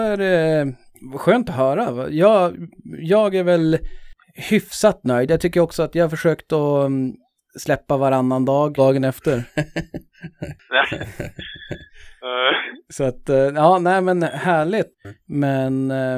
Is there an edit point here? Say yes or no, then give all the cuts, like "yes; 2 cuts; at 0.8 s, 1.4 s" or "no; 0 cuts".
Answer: yes; 2 cuts; at 8.8 s, 14.9 s